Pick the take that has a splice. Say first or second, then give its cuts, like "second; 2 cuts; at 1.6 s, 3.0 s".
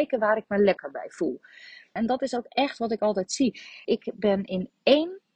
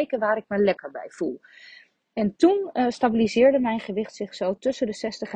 first; 2 cuts; at 2.0 s, 3.8 s